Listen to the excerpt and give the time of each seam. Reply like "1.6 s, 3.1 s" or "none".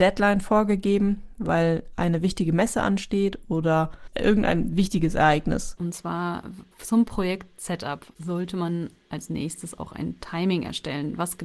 5.8 s

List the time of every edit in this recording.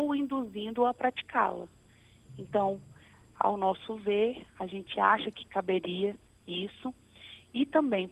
none

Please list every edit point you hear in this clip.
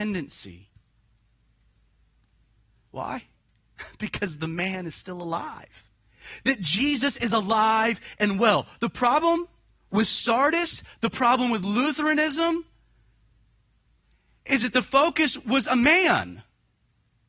none

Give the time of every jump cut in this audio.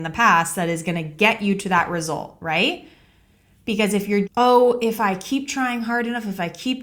4.3 s

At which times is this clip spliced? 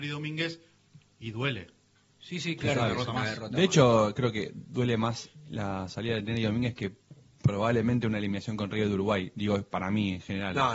2.1 s

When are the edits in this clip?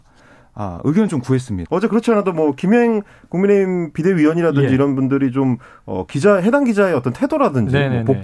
1.7 s

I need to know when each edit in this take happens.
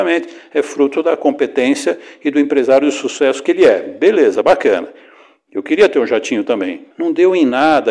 6.9 s

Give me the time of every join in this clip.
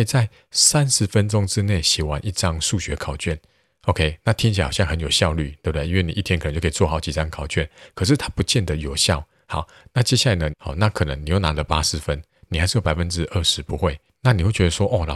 9.4 s, 10.5 s

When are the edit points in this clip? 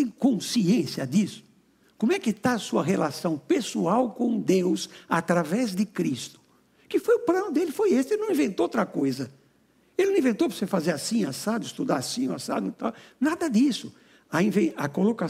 none

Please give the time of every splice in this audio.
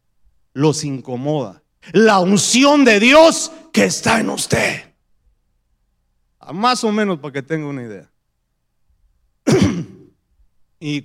1.8 s, 6.4 s

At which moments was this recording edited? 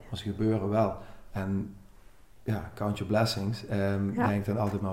none

